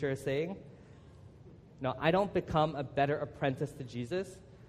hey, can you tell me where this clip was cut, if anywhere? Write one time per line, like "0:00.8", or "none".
0:01.7